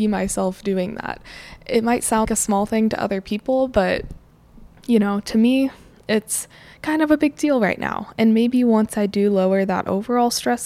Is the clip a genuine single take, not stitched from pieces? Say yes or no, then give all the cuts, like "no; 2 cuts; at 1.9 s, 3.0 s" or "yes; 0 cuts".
no; 1 cut; at 2.2 s